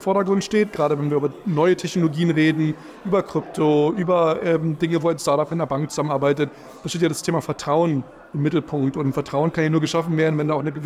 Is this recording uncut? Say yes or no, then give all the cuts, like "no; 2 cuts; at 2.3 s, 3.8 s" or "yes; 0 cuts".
yes; 0 cuts